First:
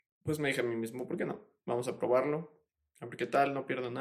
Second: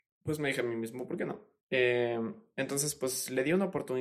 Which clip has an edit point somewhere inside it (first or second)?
second